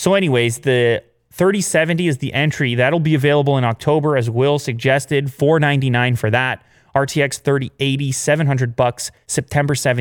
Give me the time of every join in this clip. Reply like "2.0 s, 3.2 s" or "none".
none